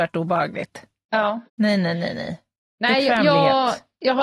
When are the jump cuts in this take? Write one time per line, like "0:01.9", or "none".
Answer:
0:01.5